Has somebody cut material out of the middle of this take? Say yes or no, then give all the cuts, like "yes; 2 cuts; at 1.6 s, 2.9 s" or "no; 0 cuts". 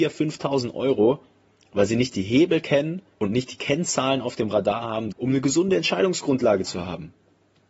yes; 2 cuts; at 3.1 s, 5.1 s